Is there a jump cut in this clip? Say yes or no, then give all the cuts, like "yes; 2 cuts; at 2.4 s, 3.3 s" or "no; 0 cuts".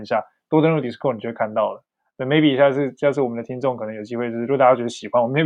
no; 0 cuts